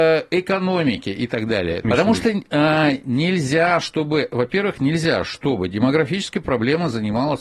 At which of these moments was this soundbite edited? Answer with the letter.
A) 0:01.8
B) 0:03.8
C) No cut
A